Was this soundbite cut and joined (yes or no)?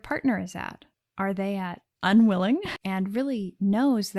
yes